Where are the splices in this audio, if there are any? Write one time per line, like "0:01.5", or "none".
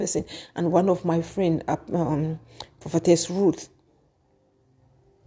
none